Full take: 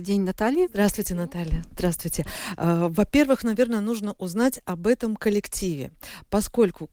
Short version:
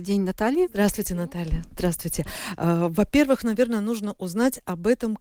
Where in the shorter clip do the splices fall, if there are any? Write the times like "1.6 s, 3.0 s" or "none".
none